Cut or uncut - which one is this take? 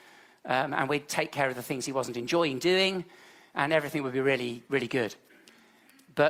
uncut